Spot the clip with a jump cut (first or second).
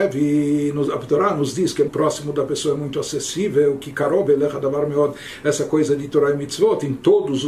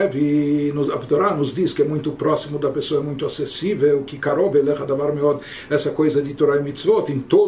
first